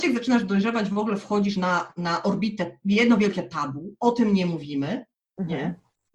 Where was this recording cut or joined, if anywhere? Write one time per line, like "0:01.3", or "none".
none

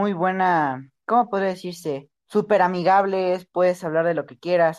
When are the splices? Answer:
0:02.2

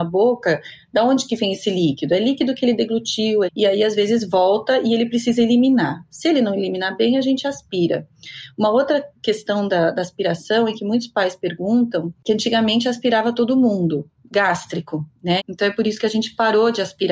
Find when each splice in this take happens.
0:03.5
0:15.4

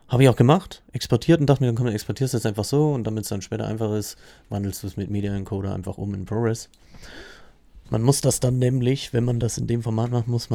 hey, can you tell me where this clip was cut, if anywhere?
0:07.8

